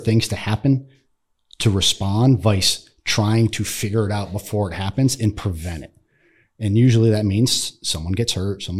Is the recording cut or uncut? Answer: uncut